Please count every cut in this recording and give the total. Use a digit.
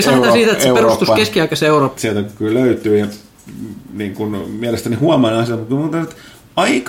1